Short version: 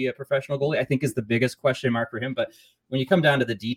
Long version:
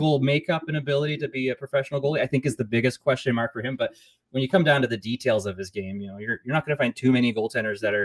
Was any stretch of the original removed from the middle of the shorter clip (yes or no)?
no